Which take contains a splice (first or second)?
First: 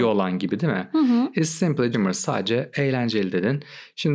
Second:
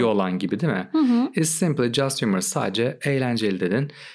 first